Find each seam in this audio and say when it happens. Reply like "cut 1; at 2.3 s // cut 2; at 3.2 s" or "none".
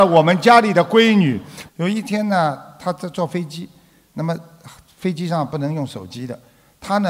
cut 1; at 1.7 s